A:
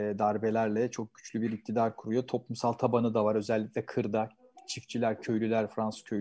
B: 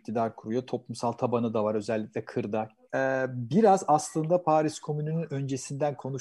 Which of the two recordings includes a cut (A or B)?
B